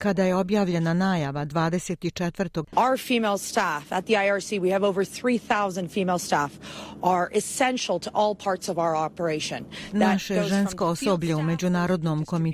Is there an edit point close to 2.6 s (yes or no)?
yes